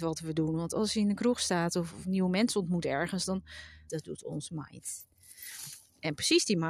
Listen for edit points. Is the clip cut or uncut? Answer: cut